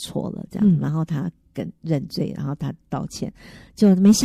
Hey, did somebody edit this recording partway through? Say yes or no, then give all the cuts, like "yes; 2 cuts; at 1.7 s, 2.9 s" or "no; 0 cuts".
no; 0 cuts